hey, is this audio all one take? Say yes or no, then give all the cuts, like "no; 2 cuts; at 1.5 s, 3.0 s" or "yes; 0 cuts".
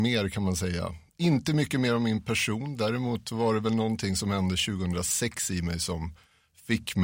yes; 0 cuts